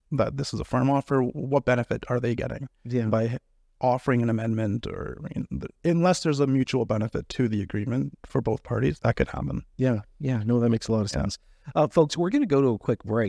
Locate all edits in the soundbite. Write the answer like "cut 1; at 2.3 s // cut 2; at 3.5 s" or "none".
cut 1; at 9.0 s